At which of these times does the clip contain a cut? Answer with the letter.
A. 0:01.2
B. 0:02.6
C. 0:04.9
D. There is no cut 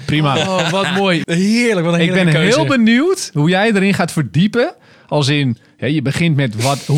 A